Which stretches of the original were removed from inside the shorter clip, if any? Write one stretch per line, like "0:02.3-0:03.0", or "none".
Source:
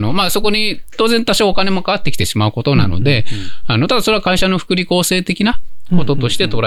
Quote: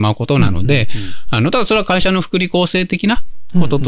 none

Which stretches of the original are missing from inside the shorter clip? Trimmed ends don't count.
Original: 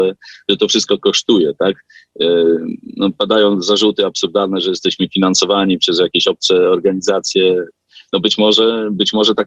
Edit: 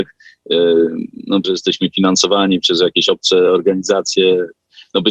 0:03.1-0:04.6

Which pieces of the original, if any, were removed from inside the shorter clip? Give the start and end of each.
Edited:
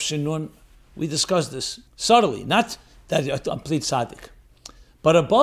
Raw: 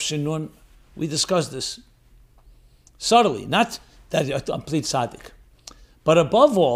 0:01.9-0:02.9

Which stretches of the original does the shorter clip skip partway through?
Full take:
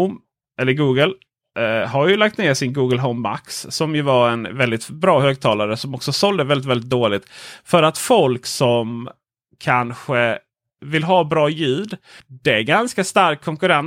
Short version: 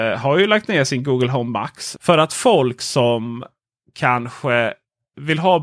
0:03.7-0:07.6

